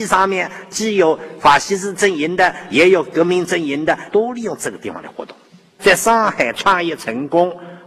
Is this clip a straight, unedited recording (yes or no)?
no